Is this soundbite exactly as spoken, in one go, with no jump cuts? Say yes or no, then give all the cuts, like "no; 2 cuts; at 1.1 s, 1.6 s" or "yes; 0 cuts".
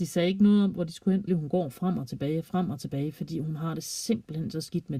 no; 1 cut; at 1.3 s